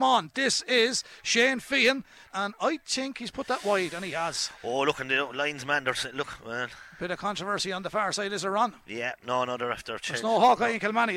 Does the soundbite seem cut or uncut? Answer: cut